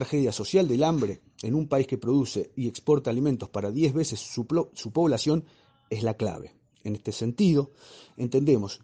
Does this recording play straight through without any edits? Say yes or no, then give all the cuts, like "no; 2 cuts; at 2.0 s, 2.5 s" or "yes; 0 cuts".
yes; 0 cuts